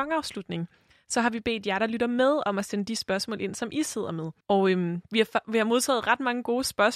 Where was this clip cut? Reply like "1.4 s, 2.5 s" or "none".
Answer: 4.4 s